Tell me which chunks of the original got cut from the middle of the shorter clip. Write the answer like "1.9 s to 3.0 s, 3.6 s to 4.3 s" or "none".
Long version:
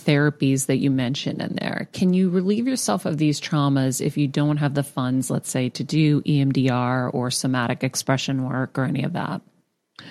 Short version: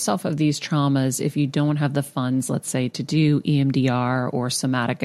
none